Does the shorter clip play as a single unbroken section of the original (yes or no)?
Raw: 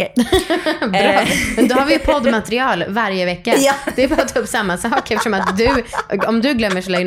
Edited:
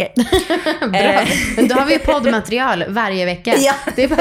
yes